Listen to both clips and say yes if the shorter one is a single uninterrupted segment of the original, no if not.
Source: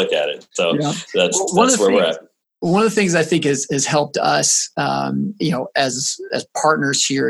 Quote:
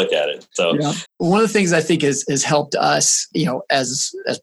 no